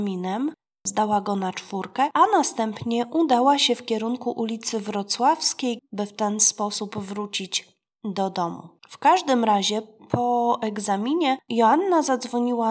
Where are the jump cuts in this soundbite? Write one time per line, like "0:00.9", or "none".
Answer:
0:05.8
0:08.8